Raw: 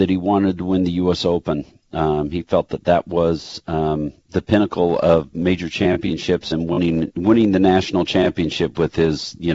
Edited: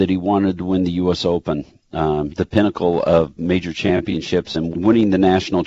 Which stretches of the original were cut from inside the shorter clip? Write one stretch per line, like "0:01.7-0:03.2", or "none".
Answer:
0:02.3-0:04.3
0:06.7-0:07.1